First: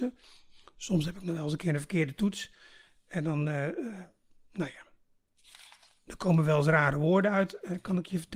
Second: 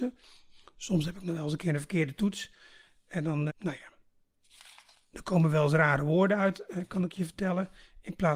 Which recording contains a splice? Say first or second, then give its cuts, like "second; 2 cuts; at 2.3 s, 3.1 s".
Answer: second; 1 cut; at 3.5 s